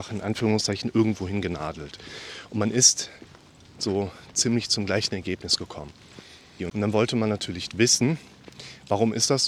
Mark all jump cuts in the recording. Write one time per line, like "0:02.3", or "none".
0:06.6